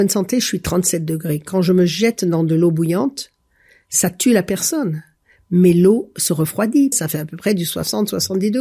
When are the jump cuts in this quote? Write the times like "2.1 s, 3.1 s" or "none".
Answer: 6.9 s